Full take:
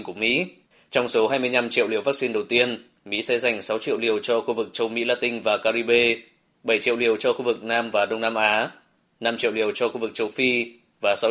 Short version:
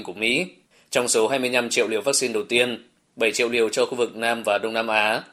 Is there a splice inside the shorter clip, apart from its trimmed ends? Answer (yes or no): yes